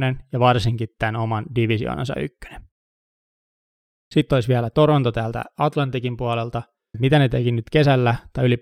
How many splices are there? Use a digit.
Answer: 1